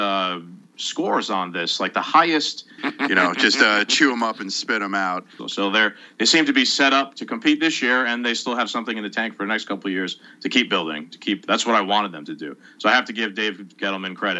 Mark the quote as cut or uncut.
cut